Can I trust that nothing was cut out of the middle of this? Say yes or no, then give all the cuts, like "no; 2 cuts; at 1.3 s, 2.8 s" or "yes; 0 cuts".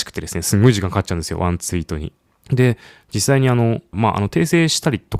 no; 2 cuts; at 2.3 s, 3.9 s